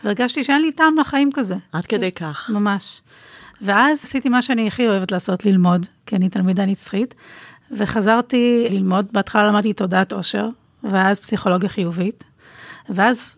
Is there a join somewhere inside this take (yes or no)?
yes